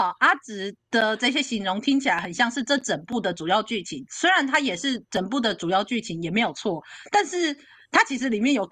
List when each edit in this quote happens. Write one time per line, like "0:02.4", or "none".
none